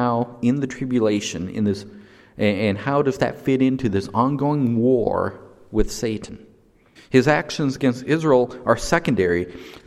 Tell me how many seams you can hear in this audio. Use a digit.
1